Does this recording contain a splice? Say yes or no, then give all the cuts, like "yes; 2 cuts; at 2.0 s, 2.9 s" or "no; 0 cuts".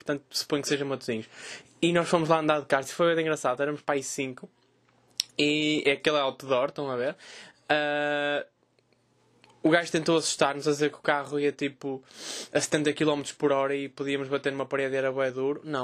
no; 0 cuts